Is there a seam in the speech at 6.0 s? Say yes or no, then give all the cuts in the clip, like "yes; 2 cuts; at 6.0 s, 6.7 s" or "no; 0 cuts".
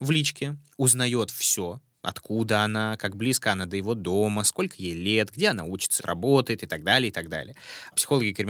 yes; 1 cut; at 6.0 s